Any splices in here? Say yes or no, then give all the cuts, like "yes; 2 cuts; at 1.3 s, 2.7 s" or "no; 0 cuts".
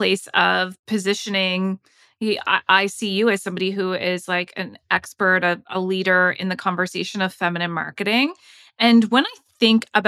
no; 0 cuts